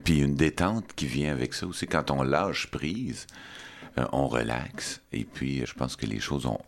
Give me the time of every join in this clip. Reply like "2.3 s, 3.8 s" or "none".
5.6 s